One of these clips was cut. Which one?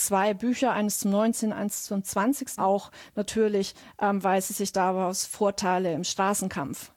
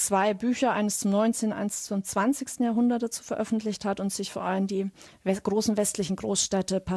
first; 1 cut; at 2.6 s

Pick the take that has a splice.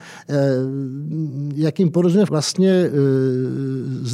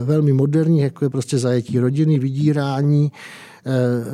first; 1 cut; at 2.3 s

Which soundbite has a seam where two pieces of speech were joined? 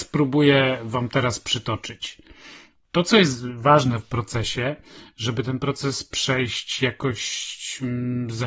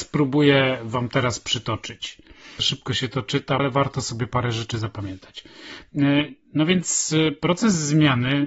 second; 2 cuts; at 2.6 s, 3.6 s

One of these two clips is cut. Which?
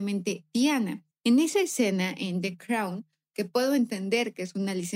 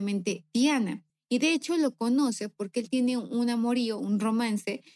first; 1 cut; at 1.1 s

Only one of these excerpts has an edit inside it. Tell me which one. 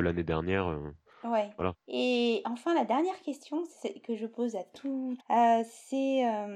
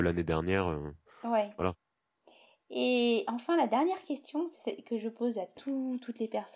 first; 2 cuts; at 1.8 s, 5.2 s

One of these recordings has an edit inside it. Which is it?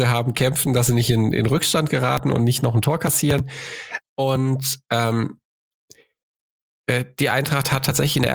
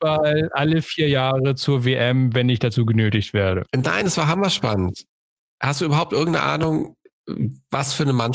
first; 1 cut; at 4.0 s

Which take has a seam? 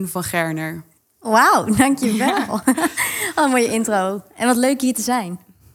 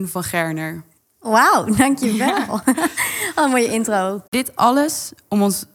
second; 1 cut; at 4.3 s

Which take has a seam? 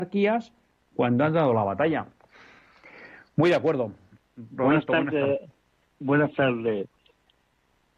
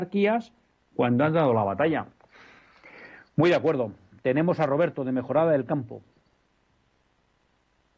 first; 1 cut; at 4.1 s

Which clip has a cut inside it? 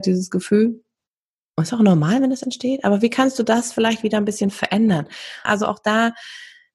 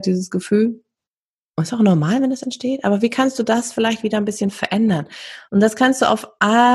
first; 1 cut; at 5.5 s

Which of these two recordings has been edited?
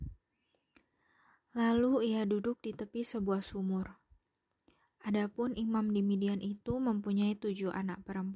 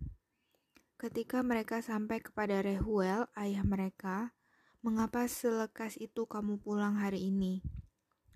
second; 2 cuts; at 0.9 s, 4.7 s

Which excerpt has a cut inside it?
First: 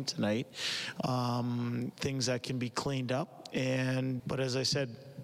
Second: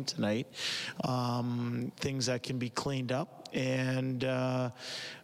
first; 1 cut; at 4.2 s

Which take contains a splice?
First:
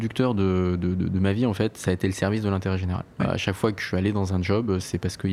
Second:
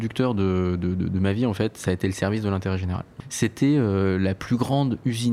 second; 1 cut; at 3.2 s

